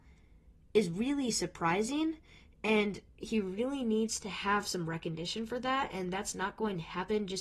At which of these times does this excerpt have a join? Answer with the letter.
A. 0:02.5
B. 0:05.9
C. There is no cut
C